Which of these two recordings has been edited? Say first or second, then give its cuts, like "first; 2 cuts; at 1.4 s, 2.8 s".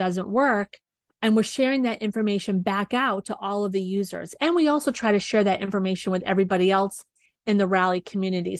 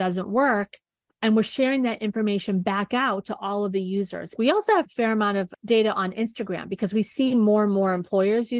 second; 1 cut; at 4.3 s